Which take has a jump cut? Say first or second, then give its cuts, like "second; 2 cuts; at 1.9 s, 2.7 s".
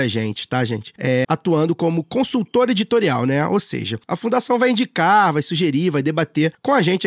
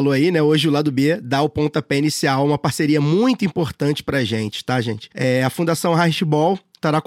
first; 1 cut; at 1.2 s